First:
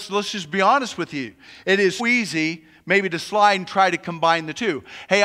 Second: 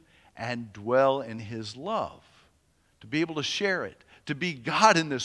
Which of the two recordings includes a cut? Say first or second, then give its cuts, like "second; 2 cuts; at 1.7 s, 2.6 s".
first; 1 cut; at 2.0 s